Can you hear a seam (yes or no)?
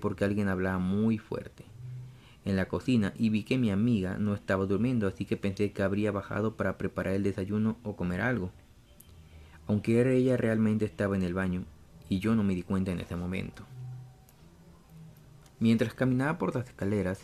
no